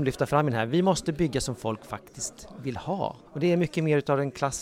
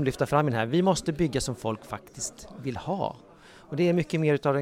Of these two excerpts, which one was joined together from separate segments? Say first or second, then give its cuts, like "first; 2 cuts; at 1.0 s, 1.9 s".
first; 1 cut; at 3.3 s